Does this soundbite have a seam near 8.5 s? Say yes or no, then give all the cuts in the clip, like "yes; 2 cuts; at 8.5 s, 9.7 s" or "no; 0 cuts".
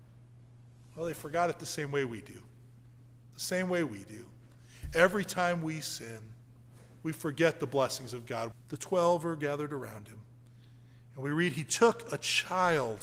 yes; 1 cut; at 8.5 s